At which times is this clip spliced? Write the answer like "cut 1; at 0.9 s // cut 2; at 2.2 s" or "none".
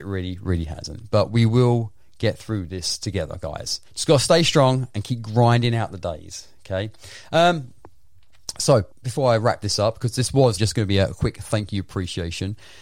cut 1; at 3.9 s // cut 2; at 8.9 s // cut 3; at 10.6 s

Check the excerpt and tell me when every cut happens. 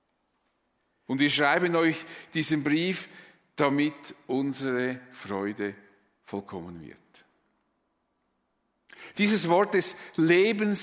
cut 1; at 1.1 s // cut 2; at 9.1 s

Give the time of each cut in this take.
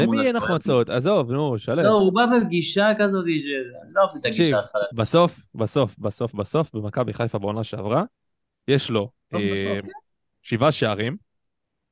none

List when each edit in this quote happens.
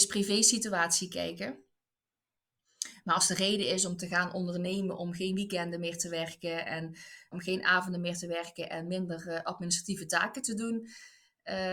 cut 1; at 7.3 s

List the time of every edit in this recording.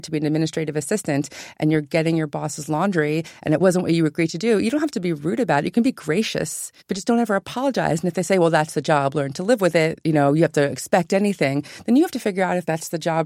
cut 1; at 6.8 s

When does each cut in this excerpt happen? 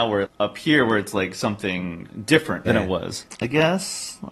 cut 1; at 2.6 s

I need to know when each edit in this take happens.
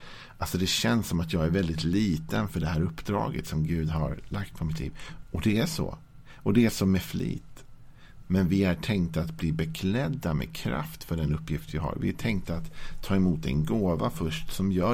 cut 1; at 8.2 s

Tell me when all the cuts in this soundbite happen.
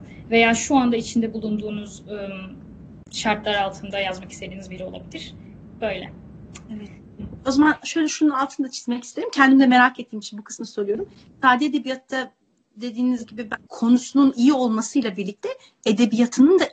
cut 1; at 13.7 s

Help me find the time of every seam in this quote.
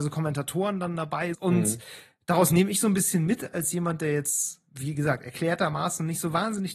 cut 1; at 1.3 s // cut 2; at 4.7 s

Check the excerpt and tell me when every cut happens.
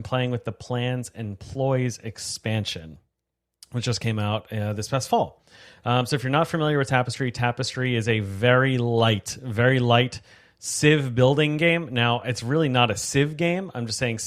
none

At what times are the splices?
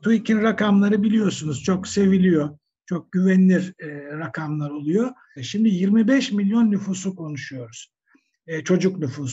cut 1; at 5.4 s

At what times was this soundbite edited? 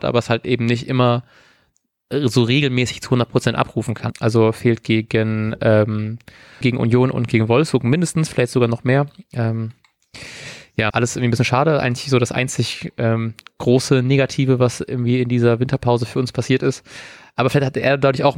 cut 1; at 4.1 s // cut 2; at 6.6 s // cut 3; at 10.9 s

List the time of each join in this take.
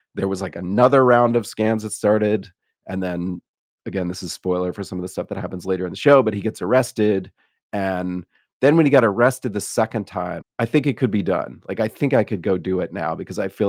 cut 1; at 10.4 s

